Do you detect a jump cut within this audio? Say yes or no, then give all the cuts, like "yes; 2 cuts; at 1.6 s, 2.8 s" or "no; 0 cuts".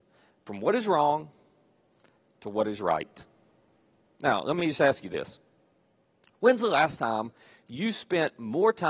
no; 0 cuts